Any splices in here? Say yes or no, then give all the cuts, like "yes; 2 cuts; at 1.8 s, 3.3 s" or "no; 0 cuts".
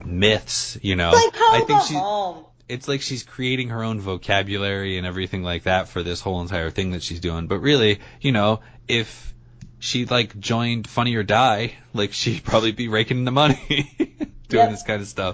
no; 0 cuts